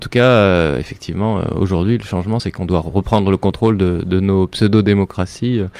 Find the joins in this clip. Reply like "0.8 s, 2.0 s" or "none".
none